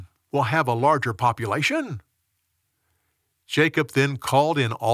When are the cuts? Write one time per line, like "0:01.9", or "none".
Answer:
none

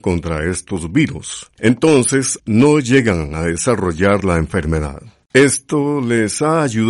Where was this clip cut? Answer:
0:02.4
0:05.2

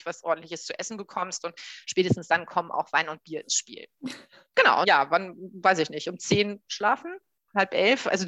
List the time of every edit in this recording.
0:04.8

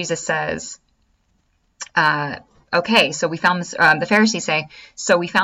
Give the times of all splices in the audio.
none

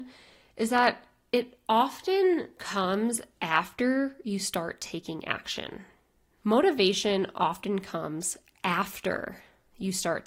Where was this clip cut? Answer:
0:06.4

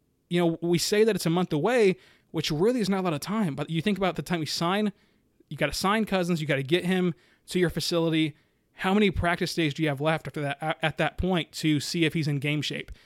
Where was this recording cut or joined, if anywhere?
none

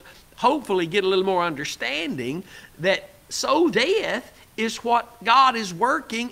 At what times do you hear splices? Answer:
0:03.7

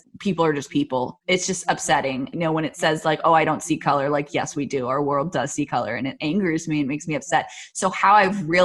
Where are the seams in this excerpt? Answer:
none

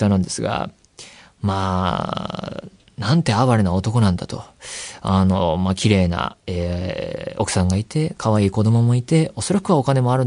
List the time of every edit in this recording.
none

